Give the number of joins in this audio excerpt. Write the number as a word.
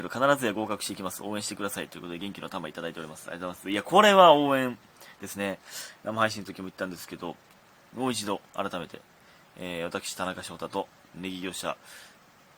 two